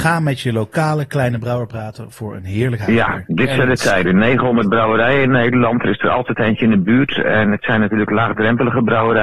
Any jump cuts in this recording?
no; 0 cuts

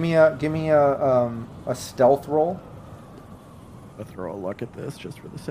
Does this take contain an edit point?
yes; 1 cut; at 3.9 s

